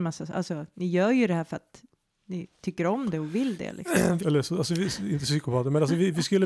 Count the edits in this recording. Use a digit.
1